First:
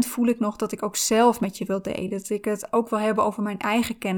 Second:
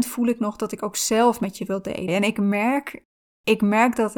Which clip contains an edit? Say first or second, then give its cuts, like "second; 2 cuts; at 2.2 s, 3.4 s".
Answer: second; 1 cut; at 2.1 s